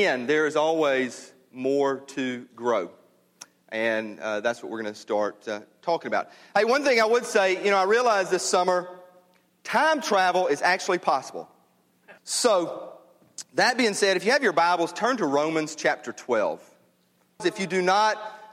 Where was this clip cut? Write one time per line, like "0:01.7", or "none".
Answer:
0:12.2
0:17.4